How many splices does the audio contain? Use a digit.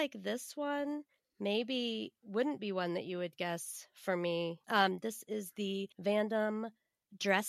2